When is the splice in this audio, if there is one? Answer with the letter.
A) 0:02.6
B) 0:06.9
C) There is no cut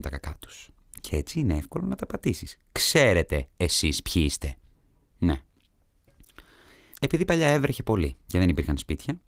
B